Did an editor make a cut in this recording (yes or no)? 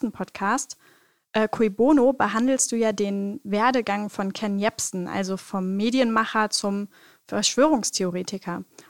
no